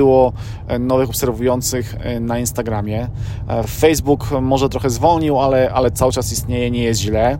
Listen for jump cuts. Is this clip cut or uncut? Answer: uncut